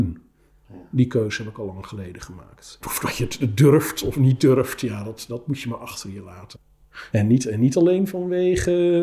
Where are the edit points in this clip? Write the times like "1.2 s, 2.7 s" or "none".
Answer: 2.8 s, 7.1 s